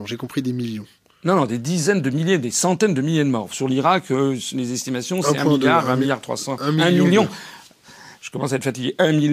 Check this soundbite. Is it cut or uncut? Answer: uncut